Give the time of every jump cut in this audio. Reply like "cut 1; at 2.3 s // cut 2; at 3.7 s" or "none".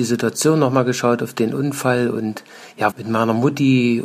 cut 1; at 2.9 s